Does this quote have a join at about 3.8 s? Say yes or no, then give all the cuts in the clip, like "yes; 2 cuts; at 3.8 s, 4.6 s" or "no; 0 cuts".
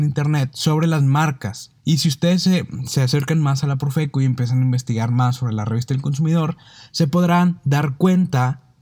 no; 1 cut; at 1.8 s